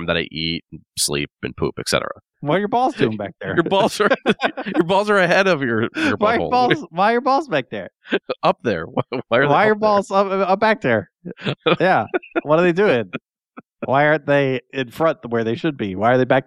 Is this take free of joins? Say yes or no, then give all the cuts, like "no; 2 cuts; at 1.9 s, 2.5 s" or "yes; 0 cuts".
no; 1 cut; at 2.3 s